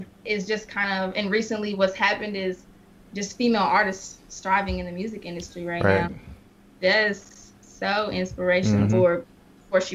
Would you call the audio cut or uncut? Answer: cut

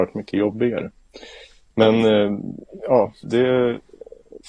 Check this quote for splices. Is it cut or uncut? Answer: cut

